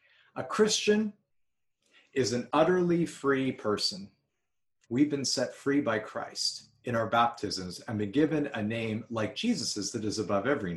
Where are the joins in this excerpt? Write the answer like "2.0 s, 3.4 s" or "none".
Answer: 4.8 s